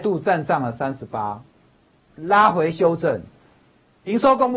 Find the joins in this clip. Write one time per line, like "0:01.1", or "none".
0:02.1